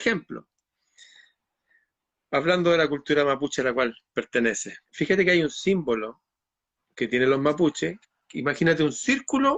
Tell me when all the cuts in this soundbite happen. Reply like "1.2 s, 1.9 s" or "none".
4.8 s